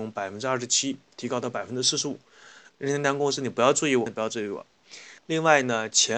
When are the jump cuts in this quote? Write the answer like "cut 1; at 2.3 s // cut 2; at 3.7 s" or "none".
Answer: cut 1; at 2.6 s // cut 2; at 4.1 s // cut 3; at 5.2 s